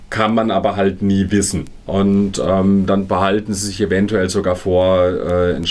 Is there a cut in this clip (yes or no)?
yes